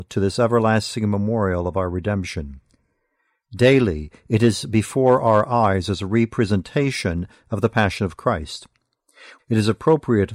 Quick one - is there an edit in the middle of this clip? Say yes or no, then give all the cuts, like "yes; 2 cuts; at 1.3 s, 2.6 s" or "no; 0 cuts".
yes; 1 cut; at 9.4 s